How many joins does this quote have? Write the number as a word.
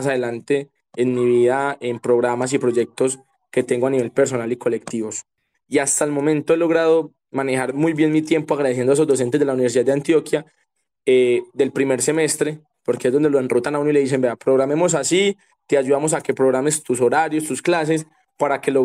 one